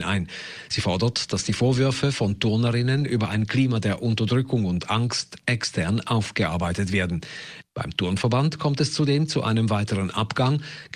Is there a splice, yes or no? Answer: no